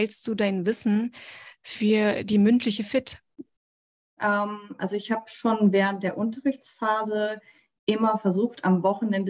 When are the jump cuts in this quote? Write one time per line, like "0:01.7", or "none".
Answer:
0:04.2